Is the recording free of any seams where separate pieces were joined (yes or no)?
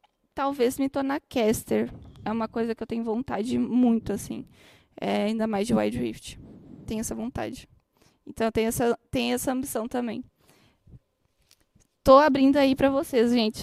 yes